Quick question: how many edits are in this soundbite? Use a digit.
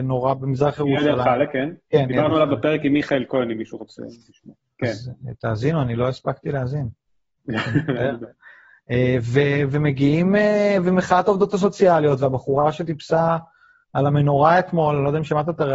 0